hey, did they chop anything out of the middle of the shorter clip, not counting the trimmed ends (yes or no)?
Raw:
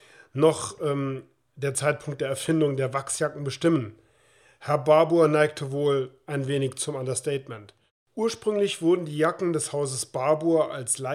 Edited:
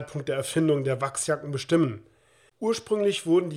yes